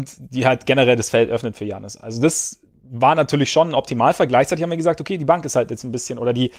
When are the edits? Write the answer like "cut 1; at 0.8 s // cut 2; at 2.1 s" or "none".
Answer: none